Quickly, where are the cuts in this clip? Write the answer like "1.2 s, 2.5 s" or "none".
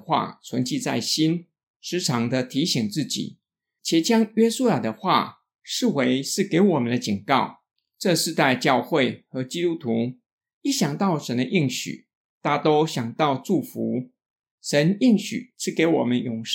none

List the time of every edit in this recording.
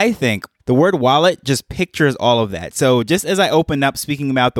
none

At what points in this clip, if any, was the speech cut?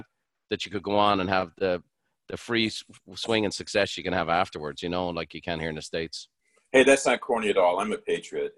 none

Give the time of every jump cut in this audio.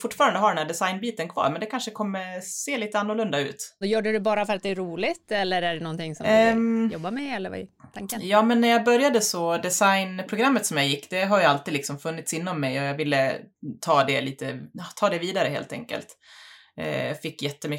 3.8 s

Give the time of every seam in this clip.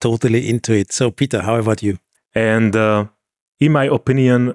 2.1 s

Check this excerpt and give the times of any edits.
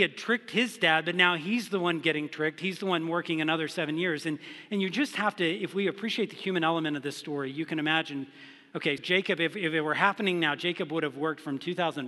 9.0 s

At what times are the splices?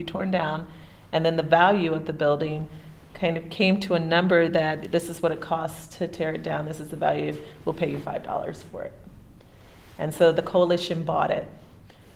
7.6 s

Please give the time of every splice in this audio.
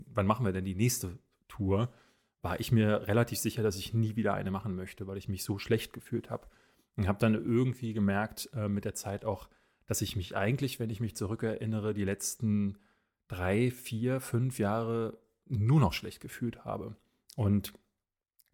none

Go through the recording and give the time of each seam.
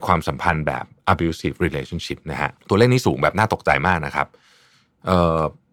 2.6 s

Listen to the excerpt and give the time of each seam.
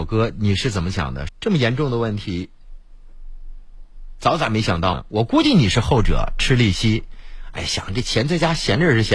1.3 s

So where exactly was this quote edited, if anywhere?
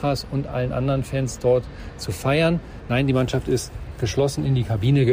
none

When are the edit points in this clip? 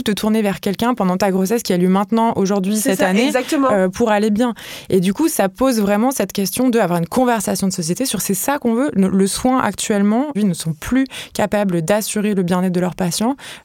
10.4 s

